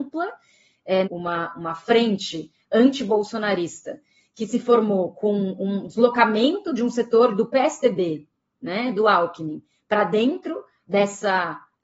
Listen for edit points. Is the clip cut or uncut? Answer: cut